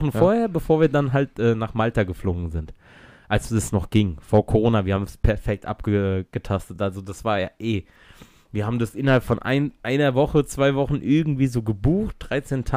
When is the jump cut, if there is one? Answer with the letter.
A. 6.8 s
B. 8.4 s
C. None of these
C